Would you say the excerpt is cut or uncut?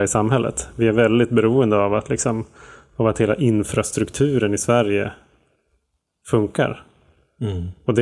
uncut